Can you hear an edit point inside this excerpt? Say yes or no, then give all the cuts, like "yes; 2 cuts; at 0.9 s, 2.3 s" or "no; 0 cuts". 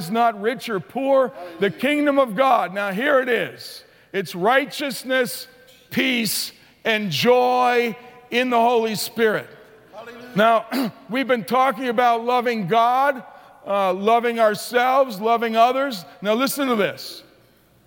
no; 0 cuts